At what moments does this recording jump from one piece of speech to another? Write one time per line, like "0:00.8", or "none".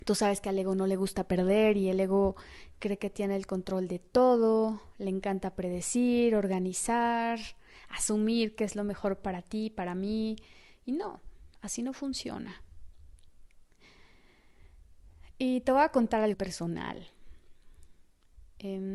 0:16.3